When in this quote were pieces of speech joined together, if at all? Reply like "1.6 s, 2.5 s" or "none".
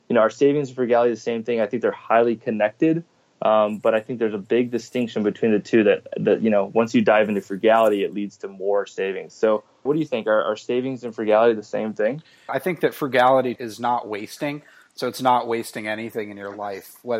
9.9 s, 12.5 s, 13.6 s